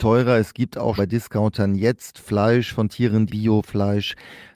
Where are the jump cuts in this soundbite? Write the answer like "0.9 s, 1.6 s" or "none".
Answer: 1.0 s, 3.3 s